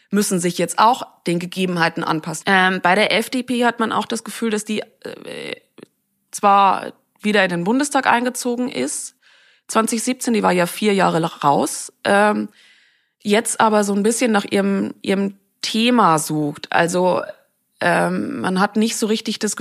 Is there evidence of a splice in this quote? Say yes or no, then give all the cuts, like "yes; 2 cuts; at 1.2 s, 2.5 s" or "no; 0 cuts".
yes; 1 cut; at 2.4 s